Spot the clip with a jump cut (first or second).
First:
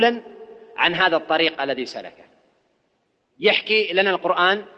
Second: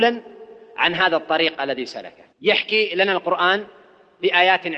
second